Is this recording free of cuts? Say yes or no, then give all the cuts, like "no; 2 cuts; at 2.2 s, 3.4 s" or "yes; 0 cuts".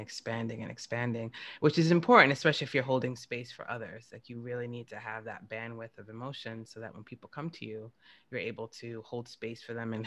yes; 0 cuts